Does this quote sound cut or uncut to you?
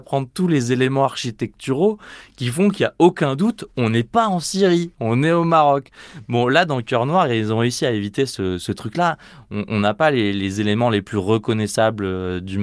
uncut